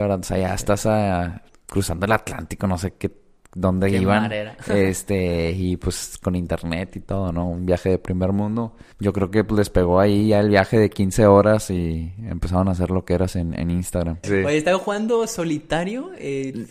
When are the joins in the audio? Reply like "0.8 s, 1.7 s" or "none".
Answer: 8.9 s, 14.2 s